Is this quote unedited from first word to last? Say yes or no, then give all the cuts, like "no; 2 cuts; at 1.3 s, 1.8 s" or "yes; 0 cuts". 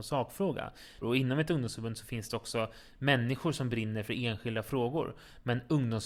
no; 1 cut; at 1.0 s